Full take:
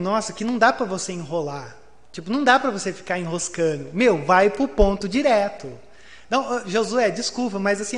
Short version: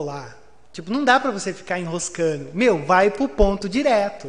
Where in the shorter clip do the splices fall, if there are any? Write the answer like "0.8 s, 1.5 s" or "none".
none